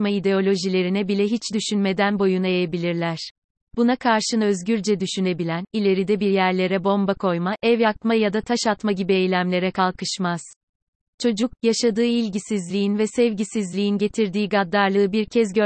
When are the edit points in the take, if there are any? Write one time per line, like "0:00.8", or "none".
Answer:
0:03.6
0:05.7